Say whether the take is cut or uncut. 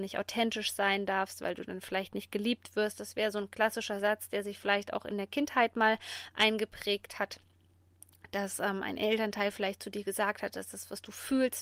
uncut